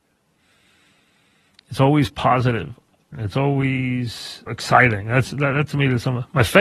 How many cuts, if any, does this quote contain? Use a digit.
2